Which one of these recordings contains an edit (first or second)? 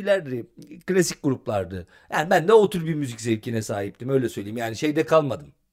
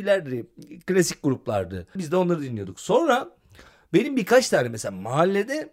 second